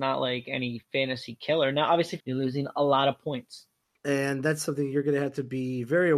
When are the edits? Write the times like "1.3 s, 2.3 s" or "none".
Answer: 2.2 s, 4.0 s